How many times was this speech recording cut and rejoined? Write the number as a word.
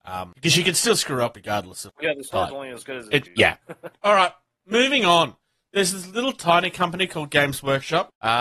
two